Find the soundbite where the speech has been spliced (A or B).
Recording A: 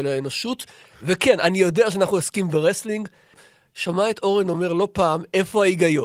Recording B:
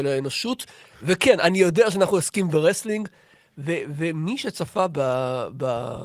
A